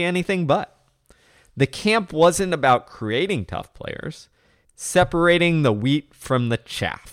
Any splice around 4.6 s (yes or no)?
yes